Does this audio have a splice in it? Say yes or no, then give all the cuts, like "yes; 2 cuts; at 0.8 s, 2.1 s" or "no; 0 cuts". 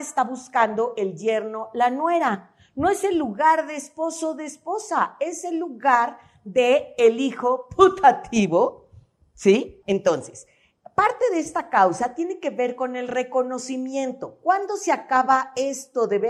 yes; 1 cut; at 9.8 s